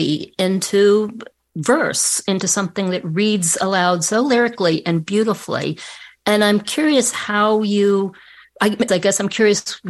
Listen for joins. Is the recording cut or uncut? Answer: cut